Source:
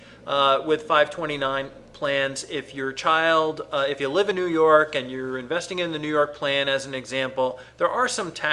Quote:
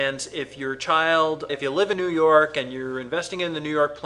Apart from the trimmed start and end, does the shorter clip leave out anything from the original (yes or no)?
yes